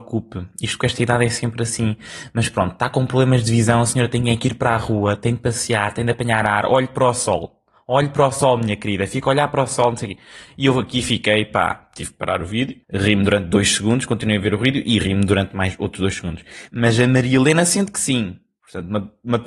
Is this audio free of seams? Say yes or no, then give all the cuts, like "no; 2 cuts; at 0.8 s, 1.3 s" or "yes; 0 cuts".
no; 2 cuts; at 12.8 s, 16.7 s